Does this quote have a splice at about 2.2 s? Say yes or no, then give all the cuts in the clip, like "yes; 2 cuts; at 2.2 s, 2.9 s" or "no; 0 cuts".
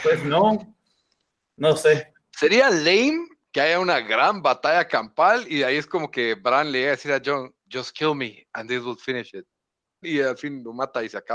no; 1 cut; at 10.0 s